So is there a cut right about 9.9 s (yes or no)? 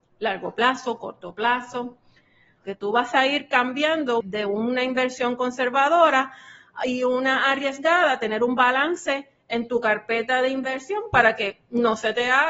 no